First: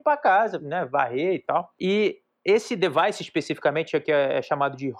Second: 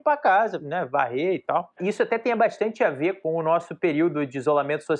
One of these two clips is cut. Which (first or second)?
second